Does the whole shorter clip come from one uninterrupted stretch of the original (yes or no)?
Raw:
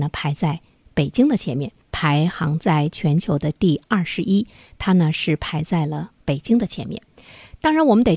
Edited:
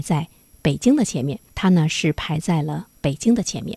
no